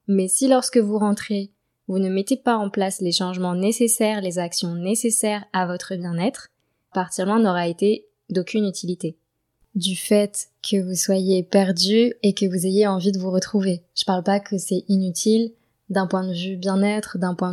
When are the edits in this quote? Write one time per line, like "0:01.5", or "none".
0:06.9